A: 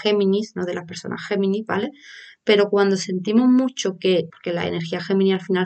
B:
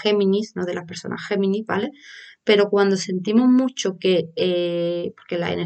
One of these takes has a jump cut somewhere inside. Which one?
A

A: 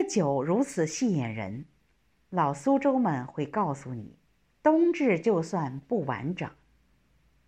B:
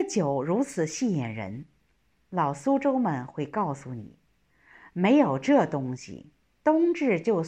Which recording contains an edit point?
A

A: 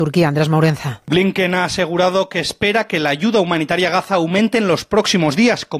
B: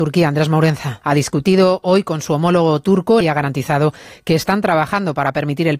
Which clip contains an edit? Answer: B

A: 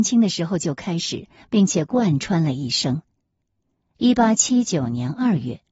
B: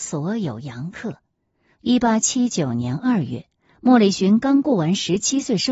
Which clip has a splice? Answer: B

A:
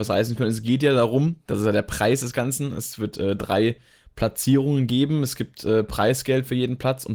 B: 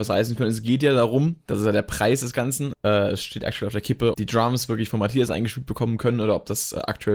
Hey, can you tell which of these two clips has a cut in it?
B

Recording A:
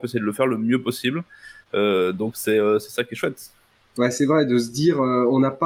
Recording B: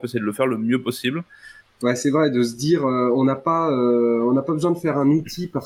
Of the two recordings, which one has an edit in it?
B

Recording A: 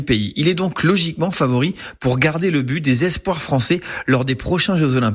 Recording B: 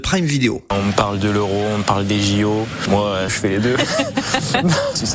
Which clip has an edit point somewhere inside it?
B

